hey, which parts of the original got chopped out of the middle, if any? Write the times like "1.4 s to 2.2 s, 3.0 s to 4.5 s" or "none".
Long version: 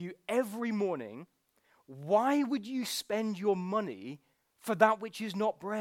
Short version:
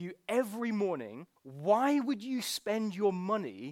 1.4 s to 1.8 s